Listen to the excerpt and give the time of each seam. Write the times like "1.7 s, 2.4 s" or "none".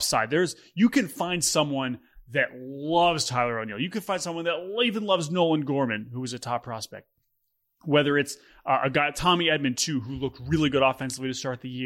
none